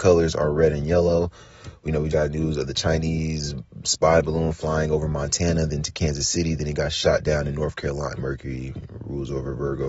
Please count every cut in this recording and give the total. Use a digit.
2